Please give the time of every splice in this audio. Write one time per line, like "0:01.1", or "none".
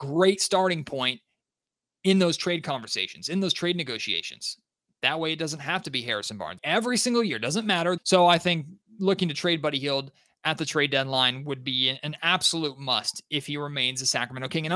0:06.6
0:08.0